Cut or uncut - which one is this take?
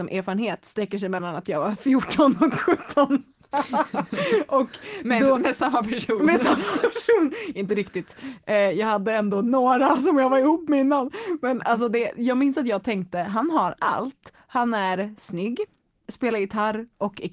uncut